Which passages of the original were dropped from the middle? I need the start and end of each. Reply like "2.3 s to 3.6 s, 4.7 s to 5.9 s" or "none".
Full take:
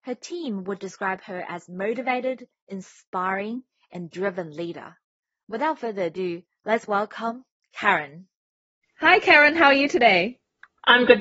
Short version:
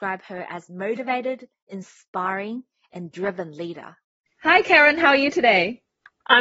5.2 s to 8.8 s